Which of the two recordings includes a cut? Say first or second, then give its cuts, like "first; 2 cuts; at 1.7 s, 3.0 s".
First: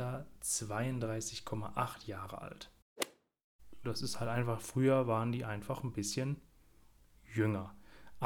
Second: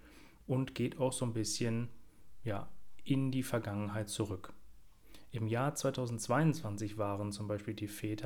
first; 1 cut; at 3.8 s